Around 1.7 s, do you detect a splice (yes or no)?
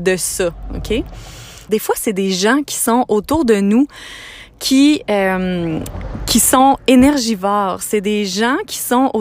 yes